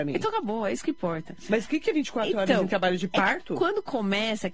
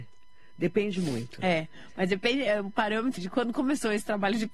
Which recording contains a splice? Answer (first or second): second